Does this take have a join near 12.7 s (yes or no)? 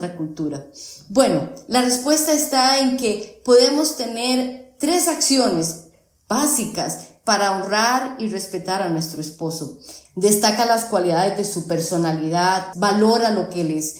yes